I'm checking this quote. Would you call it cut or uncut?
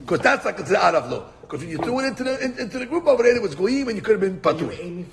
uncut